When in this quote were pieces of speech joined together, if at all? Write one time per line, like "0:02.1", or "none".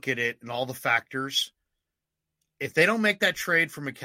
none